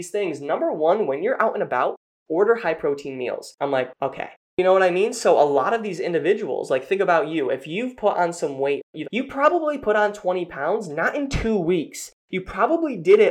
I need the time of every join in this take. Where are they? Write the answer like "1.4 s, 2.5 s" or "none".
3.6 s, 9.0 s

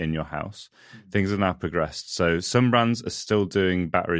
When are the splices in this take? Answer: none

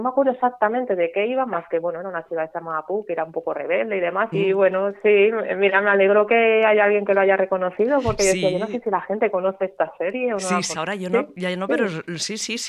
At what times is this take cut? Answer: 4.3 s, 10.7 s

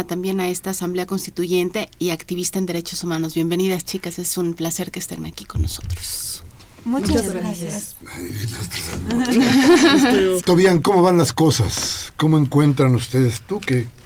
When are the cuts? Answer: 10.4 s

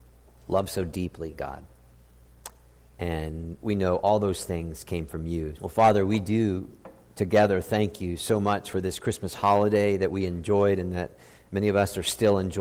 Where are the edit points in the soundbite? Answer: 5.6 s

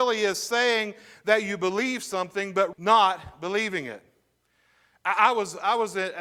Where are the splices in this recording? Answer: 2.7 s

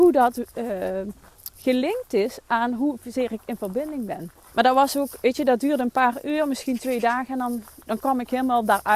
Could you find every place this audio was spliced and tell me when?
4.5 s

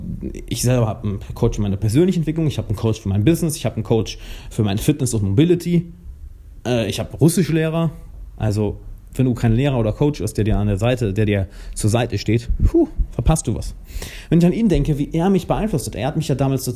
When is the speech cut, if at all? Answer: none

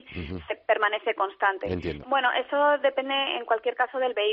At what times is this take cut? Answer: 2.0 s

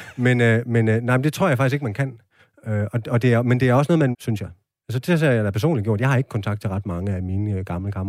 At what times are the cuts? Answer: 4.1 s

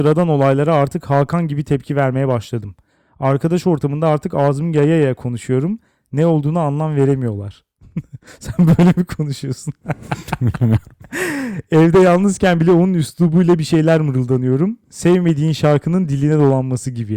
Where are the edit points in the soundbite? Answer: none

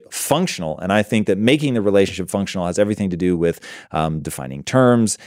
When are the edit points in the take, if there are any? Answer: none

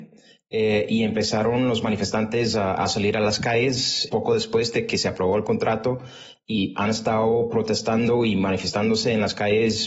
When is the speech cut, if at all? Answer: none

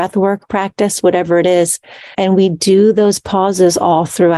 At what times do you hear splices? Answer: 2.1 s

